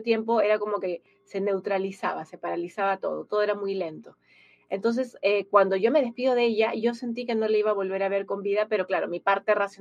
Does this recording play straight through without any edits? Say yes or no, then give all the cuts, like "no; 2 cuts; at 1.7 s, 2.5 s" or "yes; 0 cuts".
yes; 0 cuts